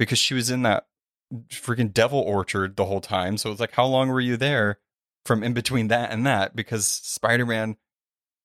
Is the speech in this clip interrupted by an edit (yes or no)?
no